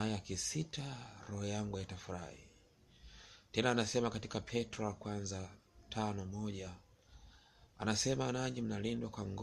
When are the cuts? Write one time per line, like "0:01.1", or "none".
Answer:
0:07.7